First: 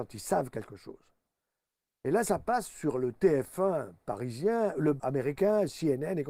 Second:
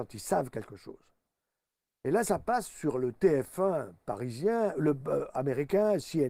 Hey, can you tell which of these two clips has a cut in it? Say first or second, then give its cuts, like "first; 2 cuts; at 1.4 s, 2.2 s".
first; 1 cut; at 5.0 s